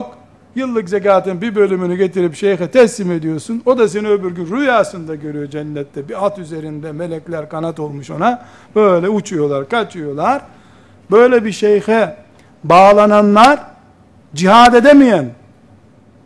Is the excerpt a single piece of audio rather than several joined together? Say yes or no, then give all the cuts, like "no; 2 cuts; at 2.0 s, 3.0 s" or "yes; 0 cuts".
yes; 0 cuts